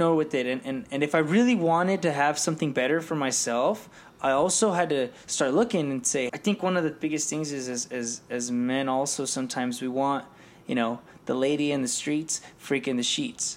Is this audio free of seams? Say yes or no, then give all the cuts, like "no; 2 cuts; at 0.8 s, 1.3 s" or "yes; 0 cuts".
no; 1 cut; at 6.3 s